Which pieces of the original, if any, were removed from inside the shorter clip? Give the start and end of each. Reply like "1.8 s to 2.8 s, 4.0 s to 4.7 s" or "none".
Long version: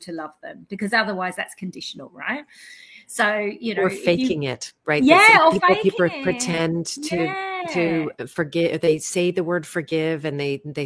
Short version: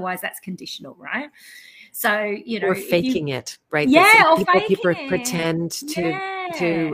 none